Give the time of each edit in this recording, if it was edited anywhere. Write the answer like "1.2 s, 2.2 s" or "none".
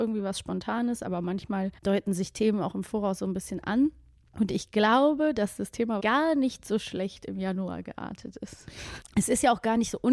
1.8 s, 6.0 s, 9.0 s